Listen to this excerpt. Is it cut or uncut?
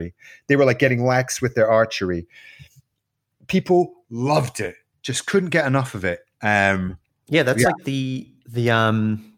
uncut